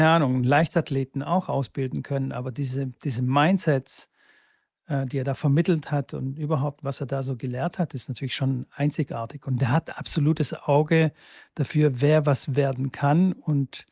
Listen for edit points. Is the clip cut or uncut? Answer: uncut